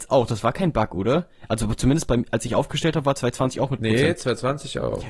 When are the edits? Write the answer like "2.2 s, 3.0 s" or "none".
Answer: none